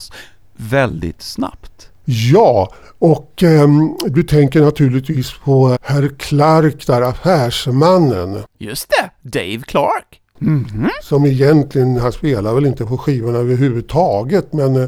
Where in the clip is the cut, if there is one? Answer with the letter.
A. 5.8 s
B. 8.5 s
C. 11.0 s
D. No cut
A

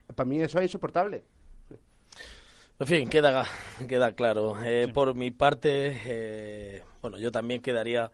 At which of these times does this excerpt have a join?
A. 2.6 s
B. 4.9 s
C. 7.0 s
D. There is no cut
D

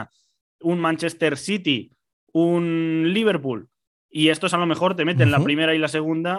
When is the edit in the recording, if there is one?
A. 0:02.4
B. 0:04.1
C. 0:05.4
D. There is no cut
D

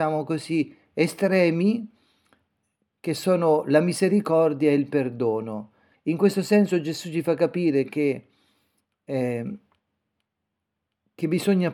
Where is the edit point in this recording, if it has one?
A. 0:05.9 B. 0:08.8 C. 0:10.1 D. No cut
A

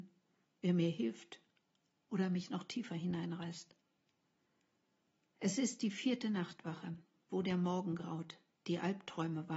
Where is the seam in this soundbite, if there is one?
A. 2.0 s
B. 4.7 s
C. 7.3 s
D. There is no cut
C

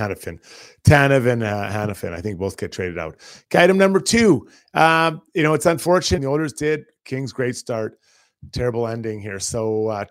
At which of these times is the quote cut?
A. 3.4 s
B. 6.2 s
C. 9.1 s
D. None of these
B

